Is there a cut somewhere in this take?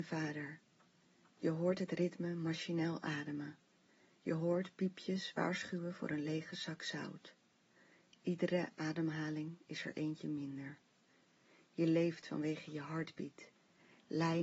no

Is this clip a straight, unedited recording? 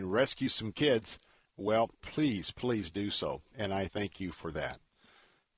yes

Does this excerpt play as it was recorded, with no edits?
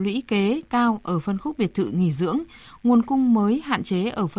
yes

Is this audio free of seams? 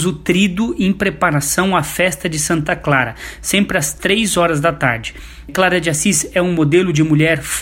no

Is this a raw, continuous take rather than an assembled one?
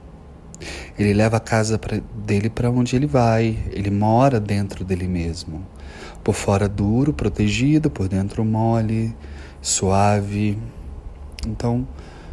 yes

